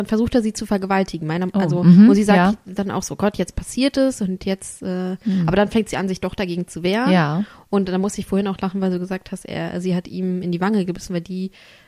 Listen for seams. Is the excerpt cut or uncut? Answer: uncut